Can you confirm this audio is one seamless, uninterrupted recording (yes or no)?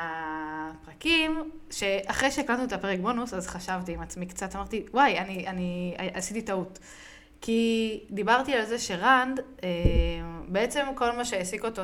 yes